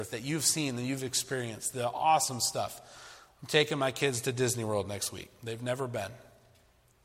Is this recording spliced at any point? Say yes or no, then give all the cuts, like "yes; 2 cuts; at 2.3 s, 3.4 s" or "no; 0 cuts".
no; 0 cuts